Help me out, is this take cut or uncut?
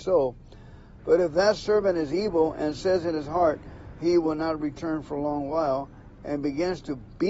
cut